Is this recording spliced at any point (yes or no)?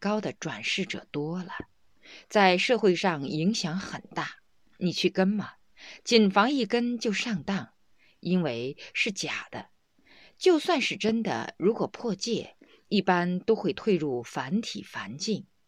no